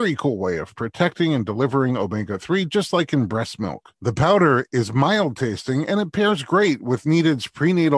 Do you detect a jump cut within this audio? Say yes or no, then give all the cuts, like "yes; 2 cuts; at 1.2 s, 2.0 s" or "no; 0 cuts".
yes; 1 cut; at 3.9 s